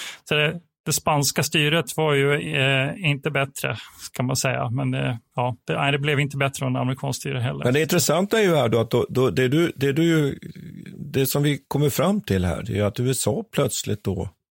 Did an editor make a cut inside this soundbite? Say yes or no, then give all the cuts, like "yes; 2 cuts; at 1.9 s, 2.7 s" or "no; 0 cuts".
no; 0 cuts